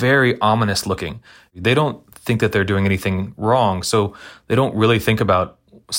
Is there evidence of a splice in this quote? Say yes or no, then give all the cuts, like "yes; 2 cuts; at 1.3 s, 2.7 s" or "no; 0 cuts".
yes; 1 cut; at 1.5 s